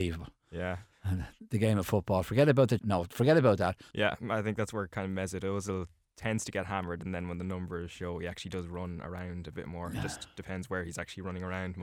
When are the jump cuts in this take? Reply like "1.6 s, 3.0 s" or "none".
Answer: 2.8 s, 3.9 s